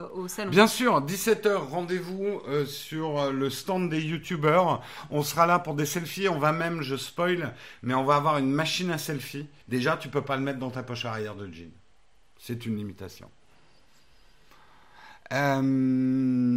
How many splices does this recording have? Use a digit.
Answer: 1